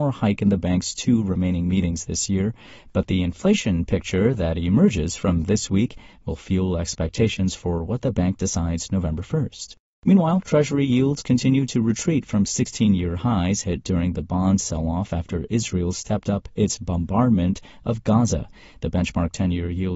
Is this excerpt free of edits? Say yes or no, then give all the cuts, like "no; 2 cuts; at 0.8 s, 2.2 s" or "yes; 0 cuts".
yes; 0 cuts